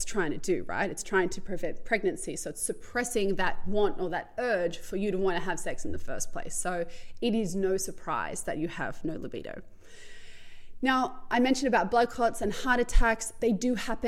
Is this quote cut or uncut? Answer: uncut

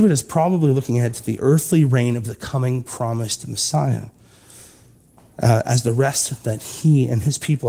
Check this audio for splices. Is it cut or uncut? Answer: uncut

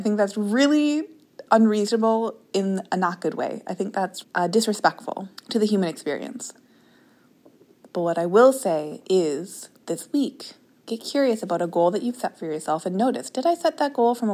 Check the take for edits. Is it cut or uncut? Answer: cut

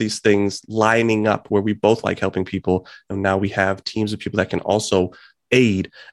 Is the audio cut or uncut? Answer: uncut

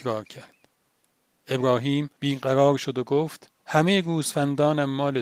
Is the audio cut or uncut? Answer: cut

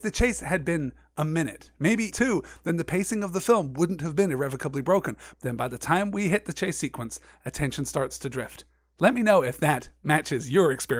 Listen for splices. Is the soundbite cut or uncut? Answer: cut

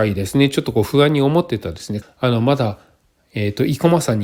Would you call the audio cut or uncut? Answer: cut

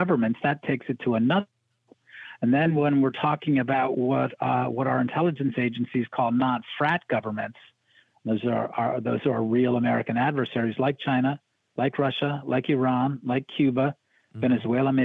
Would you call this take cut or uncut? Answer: uncut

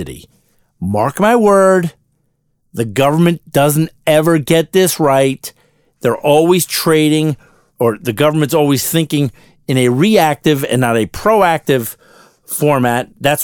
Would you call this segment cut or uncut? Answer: uncut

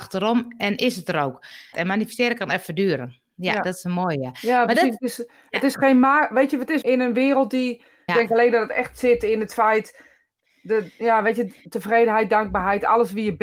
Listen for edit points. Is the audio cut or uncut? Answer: cut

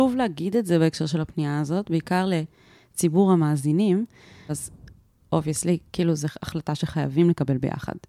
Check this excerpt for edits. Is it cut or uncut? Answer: cut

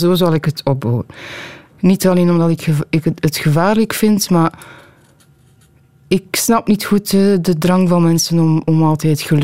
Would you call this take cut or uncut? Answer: cut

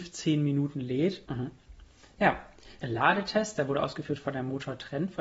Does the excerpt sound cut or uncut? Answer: cut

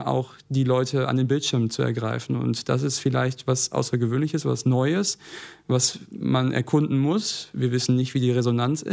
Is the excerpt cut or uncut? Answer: uncut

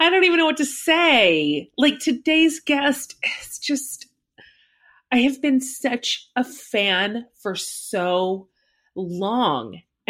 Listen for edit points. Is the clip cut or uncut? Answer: uncut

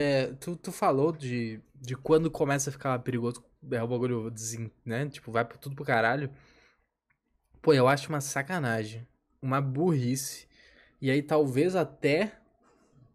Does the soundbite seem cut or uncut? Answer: uncut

